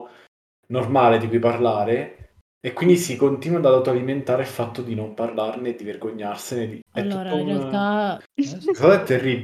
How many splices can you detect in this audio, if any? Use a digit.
2